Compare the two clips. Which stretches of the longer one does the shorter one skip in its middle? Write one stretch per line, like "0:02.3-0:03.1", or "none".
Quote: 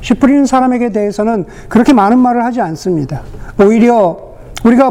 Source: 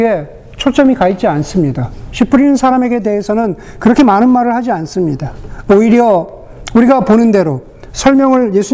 none